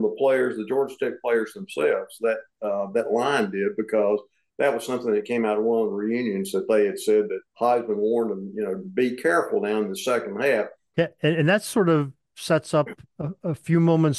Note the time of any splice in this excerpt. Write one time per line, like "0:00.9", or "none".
0:07.5
0:10.9